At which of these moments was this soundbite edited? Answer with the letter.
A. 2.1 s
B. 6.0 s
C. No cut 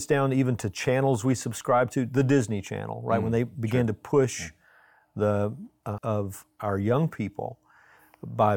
B